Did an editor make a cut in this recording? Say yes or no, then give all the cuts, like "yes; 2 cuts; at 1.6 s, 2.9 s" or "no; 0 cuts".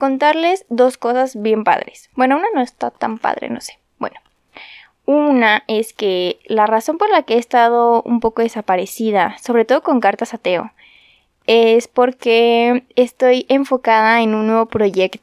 no; 0 cuts